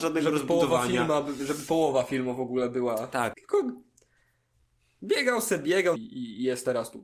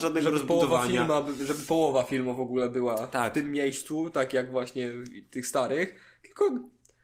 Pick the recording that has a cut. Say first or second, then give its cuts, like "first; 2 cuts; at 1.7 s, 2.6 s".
first; 2 cuts; at 3.3 s, 6.0 s